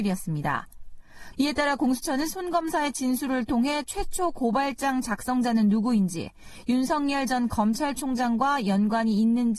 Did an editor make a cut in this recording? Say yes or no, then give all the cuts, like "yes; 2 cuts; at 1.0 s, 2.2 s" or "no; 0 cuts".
yes; 1 cut; at 1.3 s